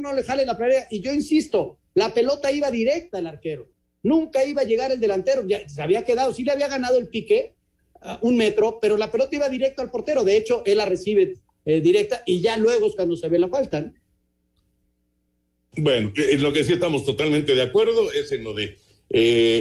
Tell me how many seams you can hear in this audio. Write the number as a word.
zero